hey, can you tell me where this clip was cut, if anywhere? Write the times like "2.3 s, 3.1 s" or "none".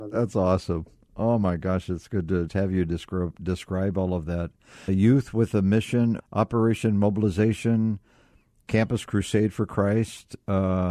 2.5 s, 4.9 s, 6.2 s